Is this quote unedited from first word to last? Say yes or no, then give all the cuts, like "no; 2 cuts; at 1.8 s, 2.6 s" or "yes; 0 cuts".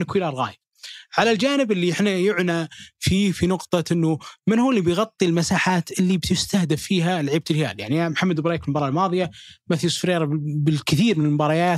yes; 0 cuts